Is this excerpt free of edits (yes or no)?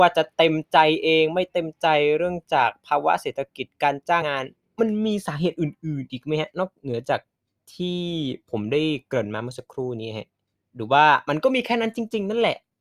no